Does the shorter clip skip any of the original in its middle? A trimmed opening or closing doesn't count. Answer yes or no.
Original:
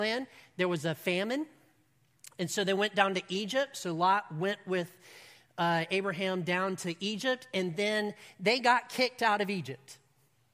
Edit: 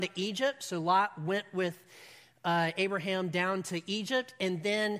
no